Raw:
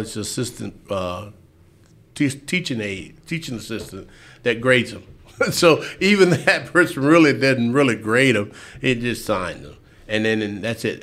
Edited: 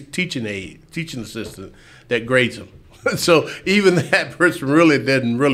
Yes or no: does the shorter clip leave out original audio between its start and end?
no